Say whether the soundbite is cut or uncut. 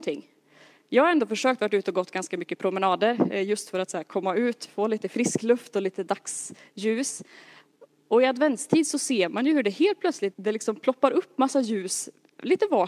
cut